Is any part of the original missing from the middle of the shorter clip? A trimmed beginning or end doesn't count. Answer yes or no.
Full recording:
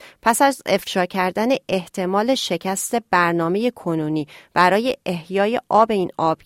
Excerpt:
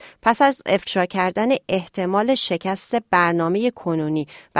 no